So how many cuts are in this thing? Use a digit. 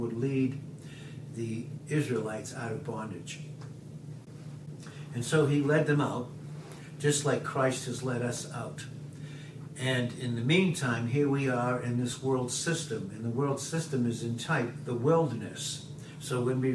0